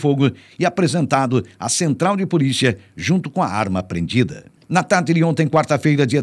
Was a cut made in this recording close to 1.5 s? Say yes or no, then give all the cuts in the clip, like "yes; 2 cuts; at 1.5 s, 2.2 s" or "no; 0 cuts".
no; 1 cut; at 4.6 s